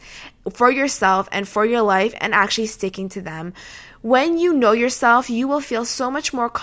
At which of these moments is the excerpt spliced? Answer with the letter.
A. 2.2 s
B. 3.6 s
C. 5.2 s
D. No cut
D